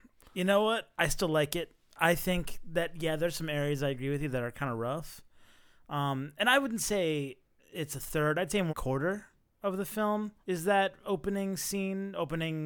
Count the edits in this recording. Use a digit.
2